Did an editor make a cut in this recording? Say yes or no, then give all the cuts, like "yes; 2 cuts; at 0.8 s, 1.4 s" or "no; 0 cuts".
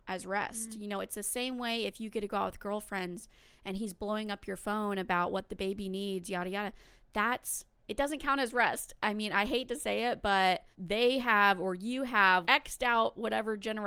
yes; 2 cuts; at 10.7 s, 12.4 s